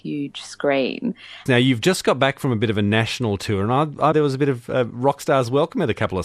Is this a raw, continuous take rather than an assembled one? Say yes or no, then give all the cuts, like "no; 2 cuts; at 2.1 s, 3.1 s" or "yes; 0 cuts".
no; 2 cuts; at 1.5 s, 4.1 s